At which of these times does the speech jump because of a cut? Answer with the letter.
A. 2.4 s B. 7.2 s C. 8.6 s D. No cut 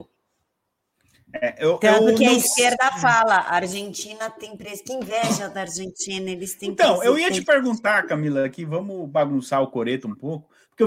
D